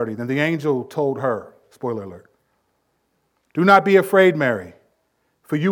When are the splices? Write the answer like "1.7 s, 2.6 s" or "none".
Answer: 1.6 s